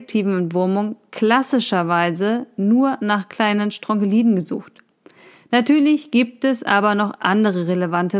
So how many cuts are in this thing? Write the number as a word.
zero